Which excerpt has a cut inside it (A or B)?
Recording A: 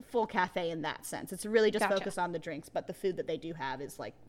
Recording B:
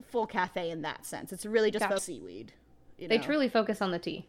B